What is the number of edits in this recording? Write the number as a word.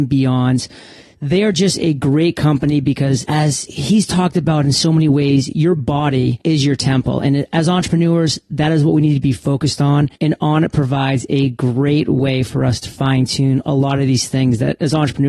two